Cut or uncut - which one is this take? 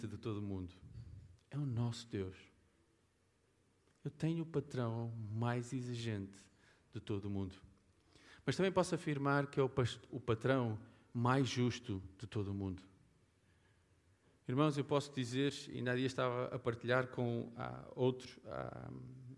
cut